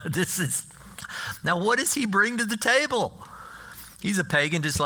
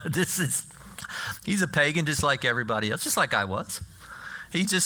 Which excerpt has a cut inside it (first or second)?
second